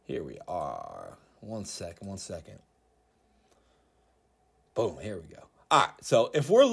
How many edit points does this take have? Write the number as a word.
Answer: zero